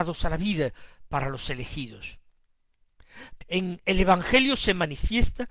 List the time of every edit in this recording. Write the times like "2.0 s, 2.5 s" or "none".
3.4 s